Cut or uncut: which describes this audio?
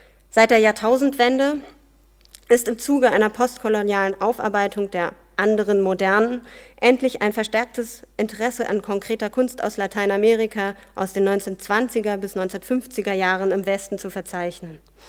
uncut